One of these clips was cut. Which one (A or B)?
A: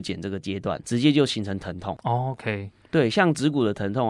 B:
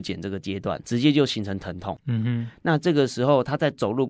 B